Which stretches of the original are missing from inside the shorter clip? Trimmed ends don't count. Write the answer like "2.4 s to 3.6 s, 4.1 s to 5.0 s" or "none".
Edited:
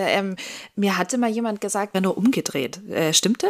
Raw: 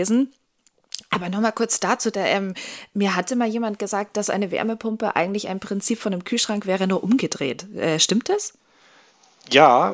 4.1 s to 6.8 s